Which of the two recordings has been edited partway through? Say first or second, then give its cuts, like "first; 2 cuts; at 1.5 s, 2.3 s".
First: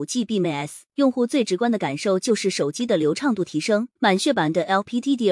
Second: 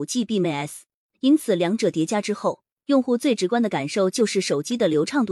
first; 2 cuts; at 0.9 s, 4.0 s